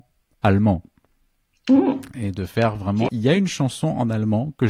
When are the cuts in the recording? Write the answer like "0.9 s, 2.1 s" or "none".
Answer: 3.1 s